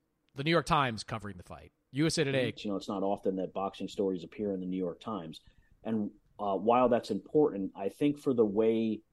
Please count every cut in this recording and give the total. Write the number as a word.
one